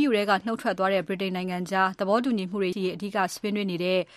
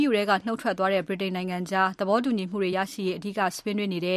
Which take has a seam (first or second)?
first